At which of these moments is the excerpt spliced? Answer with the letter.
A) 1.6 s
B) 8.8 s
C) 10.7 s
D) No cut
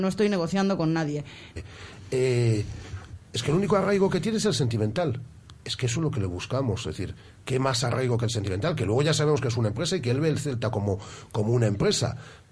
A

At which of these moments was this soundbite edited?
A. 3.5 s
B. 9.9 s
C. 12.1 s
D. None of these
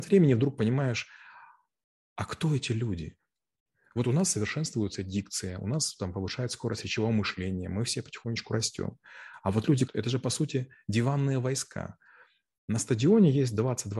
B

